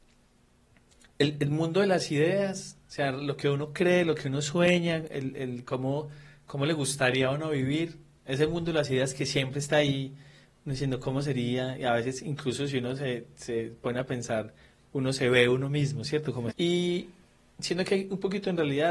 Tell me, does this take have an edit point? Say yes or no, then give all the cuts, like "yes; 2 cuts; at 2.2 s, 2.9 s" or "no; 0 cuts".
yes; 1 cut; at 16.5 s